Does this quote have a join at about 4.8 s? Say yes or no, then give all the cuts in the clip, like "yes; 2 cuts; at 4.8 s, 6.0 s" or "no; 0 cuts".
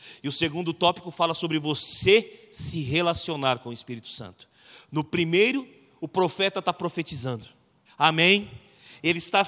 no; 1 cut; at 7.9 s